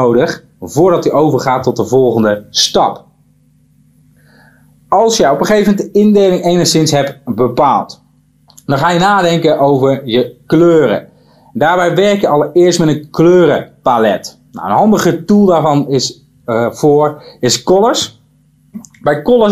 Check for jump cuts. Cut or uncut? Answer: uncut